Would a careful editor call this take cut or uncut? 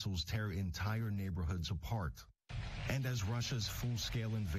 uncut